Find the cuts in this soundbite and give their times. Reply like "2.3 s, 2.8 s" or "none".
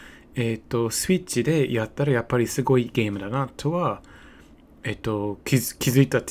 2.9 s